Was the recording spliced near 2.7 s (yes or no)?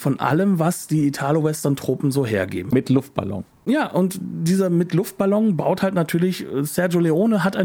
yes